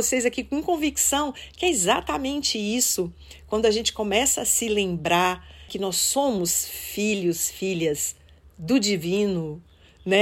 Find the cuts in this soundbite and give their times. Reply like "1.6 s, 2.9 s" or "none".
5.7 s